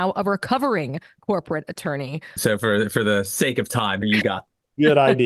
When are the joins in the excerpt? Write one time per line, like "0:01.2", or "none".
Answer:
0:02.4
0:04.0